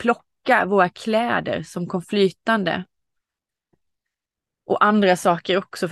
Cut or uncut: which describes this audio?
uncut